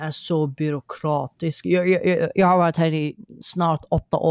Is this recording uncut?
yes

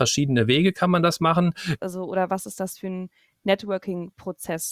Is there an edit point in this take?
yes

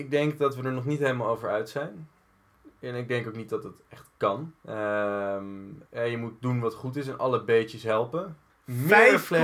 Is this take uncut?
no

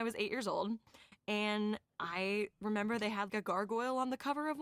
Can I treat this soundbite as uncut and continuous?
no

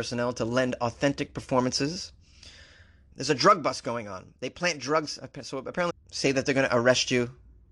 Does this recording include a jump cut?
yes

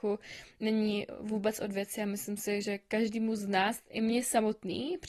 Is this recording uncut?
yes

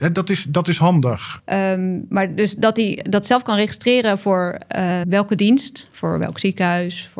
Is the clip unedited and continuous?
no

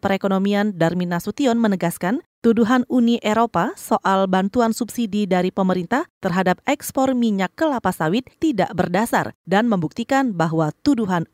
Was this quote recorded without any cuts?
yes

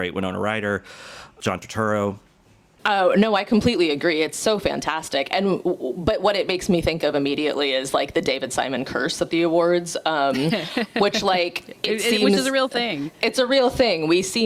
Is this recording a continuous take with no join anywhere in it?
yes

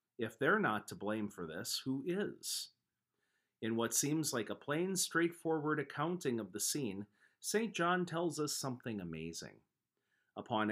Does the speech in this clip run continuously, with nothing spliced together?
yes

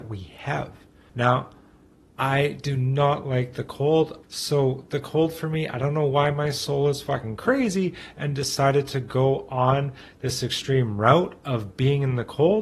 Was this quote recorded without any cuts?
no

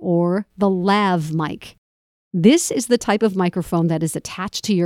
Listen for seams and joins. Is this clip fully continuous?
yes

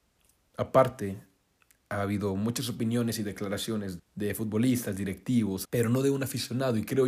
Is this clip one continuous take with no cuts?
no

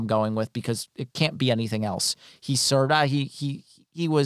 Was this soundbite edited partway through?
yes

